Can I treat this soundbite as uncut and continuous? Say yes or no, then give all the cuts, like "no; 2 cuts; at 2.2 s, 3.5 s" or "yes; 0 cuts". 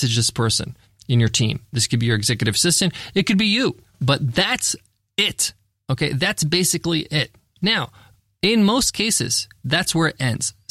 yes; 0 cuts